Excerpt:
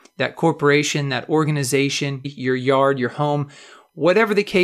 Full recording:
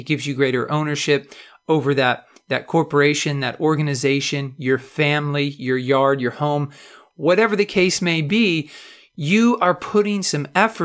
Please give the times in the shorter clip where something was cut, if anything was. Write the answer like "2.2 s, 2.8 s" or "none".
2.2 s